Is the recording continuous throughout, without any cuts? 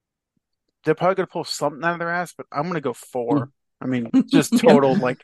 no; 1 cut; at 4.1 s

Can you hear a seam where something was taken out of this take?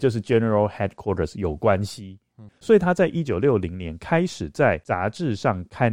yes; 1 cut; at 2.5 s

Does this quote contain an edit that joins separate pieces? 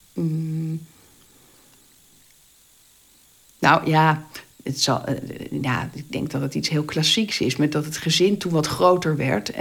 no; 0 cuts

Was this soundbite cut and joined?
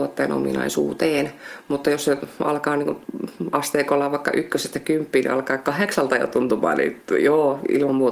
no; 0 cuts

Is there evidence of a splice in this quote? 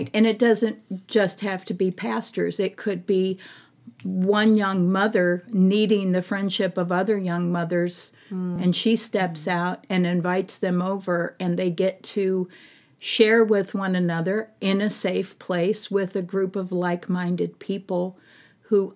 no; 0 cuts

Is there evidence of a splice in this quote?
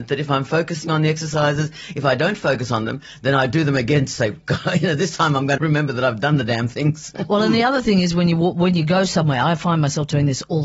yes; 1 cut; at 5.6 s

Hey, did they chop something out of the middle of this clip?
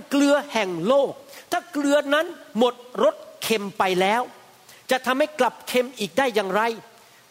no; 0 cuts

